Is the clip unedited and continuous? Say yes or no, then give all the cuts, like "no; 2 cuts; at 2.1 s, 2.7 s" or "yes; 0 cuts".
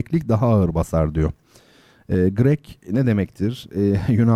yes; 0 cuts